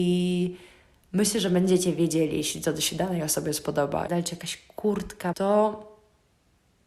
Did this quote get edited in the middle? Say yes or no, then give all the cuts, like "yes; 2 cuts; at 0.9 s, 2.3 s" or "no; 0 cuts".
yes; 2 cuts; at 4.1 s, 5.3 s